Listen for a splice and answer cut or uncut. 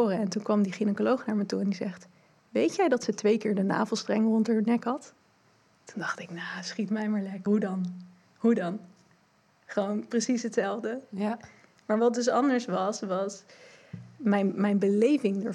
uncut